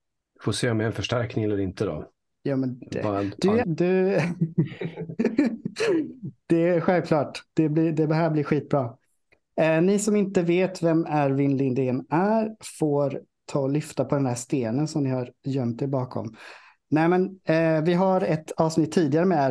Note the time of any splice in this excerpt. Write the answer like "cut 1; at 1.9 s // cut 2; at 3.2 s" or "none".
cut 1; at 3.6 s

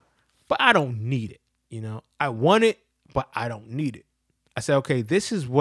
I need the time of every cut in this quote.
cut 1; at 4.4 s

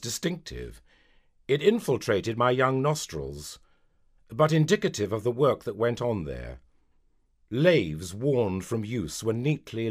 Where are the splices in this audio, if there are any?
cut 1; at 4.2 s

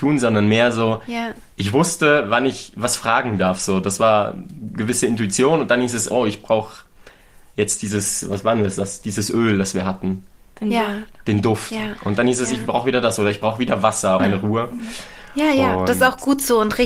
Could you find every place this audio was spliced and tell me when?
cut 1; at 14.2 s

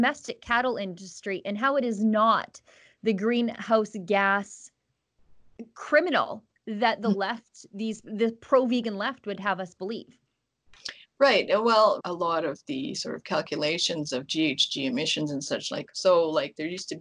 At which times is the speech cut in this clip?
cut 1; at 12.0 s // cut 2; at 15.9 s

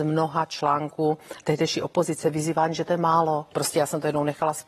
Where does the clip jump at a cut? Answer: cut 1; at 1.4 s // cut 2; at 3.5 s

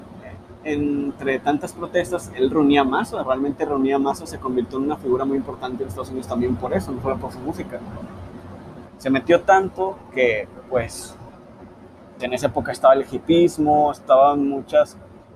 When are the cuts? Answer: cut 1; at 8.9 s // cut 2; at 12.2 s

